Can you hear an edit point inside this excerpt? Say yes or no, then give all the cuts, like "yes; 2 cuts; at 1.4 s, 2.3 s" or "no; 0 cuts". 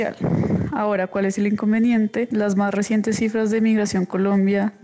yes; 1 cut; at 2.3 s